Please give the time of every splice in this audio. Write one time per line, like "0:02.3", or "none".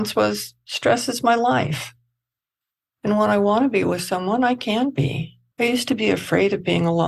0:02.9
0:05.5